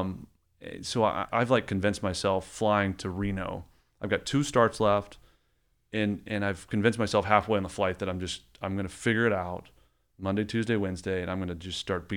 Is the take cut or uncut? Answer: cut